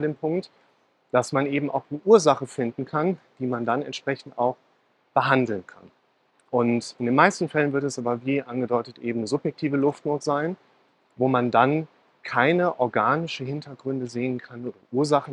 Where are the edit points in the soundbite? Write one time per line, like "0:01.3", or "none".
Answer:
none